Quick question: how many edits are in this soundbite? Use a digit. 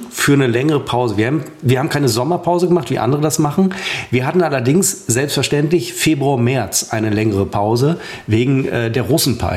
0